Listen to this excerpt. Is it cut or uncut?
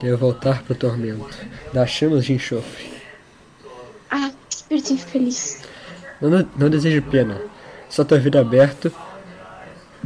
uncut